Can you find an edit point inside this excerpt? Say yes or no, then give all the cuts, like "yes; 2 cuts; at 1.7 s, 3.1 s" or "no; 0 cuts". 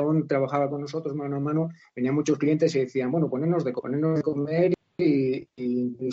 no; 0 cuts